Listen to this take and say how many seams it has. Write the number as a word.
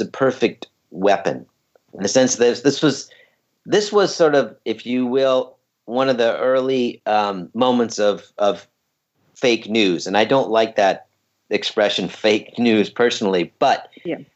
zero